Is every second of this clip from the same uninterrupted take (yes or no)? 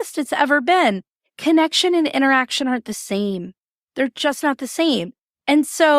yes